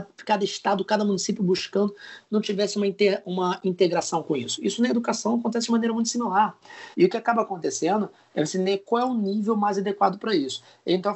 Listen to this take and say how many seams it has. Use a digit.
1